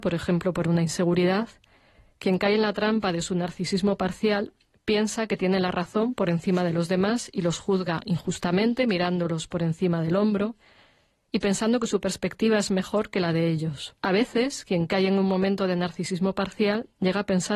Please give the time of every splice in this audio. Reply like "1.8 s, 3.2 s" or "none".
14.0 s